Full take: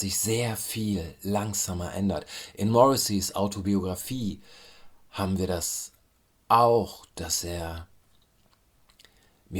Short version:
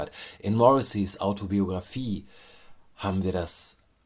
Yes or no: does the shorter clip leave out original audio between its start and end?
no